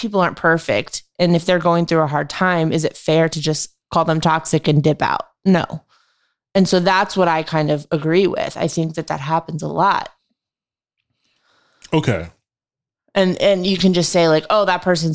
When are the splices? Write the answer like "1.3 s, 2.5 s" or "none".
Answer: none